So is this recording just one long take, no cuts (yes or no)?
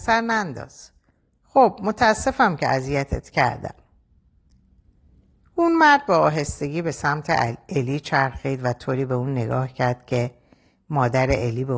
yes